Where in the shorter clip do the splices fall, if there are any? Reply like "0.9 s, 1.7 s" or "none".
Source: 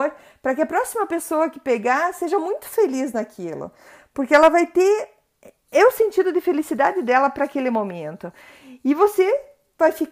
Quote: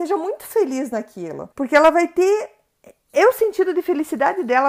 1.5 s

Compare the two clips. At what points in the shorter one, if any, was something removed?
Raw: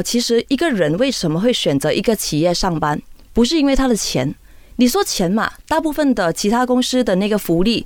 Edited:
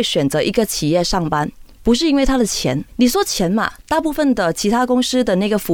2.9 s

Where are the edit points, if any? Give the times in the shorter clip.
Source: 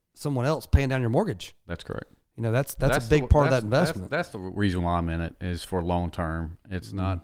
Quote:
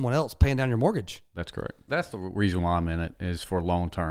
1.9 s

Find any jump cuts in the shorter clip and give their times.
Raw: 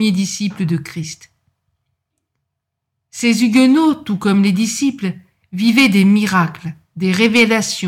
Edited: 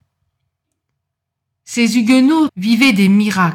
2.5 s

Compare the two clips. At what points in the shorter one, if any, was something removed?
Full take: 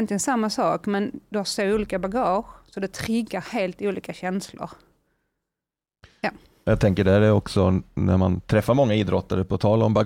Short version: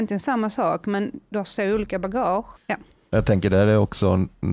2.5 s

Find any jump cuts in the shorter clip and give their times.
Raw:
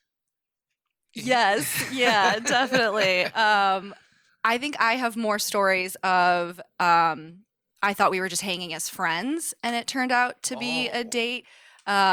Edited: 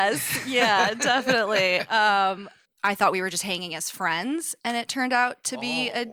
2.6 s

